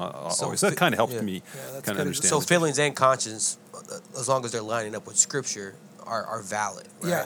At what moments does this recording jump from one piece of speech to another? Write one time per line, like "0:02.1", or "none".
none